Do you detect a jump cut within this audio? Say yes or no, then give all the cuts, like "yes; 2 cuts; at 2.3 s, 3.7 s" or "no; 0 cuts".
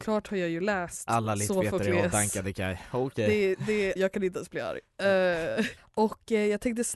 yes; 2 cuts; at 4.0 s, 5.8 s